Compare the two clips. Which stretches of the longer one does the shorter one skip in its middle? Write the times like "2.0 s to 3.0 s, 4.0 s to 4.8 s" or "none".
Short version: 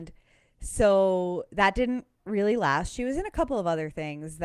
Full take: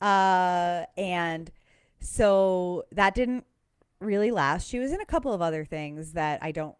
3.5 s to 3.9 s